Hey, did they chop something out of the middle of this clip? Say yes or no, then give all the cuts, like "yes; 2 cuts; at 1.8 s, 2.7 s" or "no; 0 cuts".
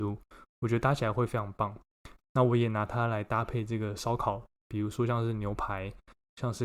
yes; 1 cut; at 2.2 s